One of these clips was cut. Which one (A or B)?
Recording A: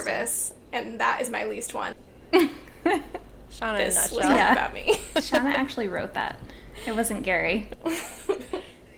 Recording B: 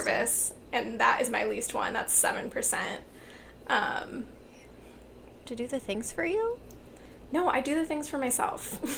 A